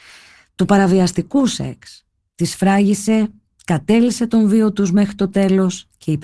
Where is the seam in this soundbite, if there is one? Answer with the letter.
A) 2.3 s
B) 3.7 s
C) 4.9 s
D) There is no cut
D